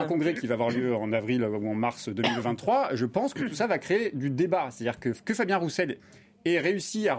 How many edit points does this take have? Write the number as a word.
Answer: zero